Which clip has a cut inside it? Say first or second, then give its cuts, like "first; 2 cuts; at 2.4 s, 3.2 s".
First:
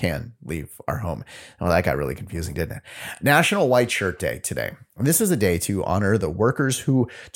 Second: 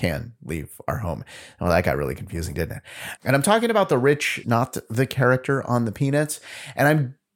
second; 2 cuts; at 3.2 s, 4.4 s